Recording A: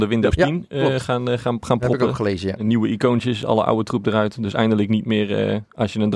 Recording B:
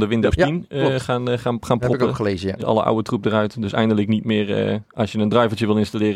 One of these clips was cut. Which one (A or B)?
B